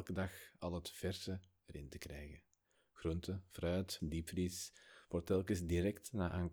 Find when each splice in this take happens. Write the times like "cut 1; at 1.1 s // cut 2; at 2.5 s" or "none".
cut 1; at 4.0 s